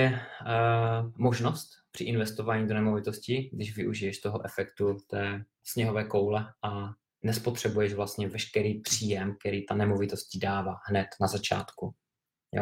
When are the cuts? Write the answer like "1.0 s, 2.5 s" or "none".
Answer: 5.6 s